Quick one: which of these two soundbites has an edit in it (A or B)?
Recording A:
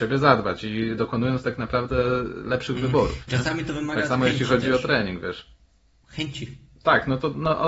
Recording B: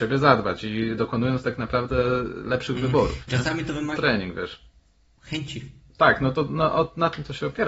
B